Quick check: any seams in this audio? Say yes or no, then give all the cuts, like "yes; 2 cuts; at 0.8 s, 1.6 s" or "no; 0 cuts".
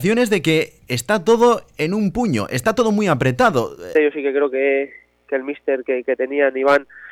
yes; 1 cut; at 3.9 s